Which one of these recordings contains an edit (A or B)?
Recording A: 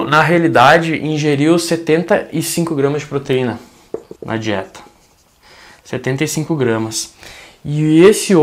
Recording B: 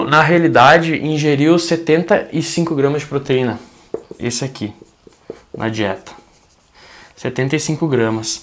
A